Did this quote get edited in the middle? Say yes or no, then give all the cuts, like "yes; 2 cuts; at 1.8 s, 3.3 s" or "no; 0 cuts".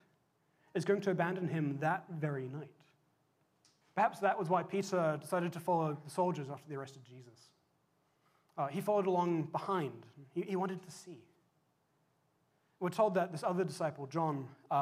yes; 1 cut; at 3.8 s